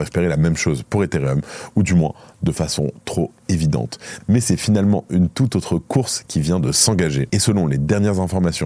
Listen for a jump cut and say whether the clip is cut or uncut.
cut